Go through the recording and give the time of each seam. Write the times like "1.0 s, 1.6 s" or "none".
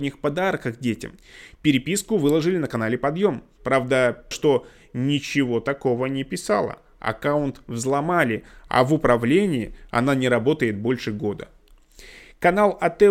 4.3 s